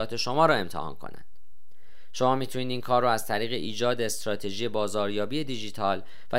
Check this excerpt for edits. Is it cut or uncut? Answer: uncut